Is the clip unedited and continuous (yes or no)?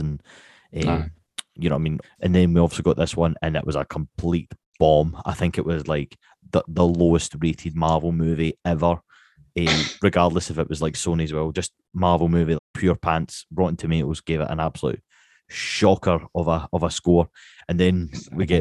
no